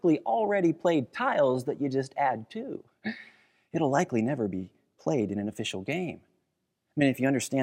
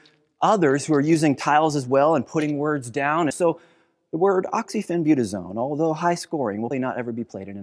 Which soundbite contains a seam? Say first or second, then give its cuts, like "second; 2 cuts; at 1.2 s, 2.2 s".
second; 2 cuts; at 3.3 s, 6.7 s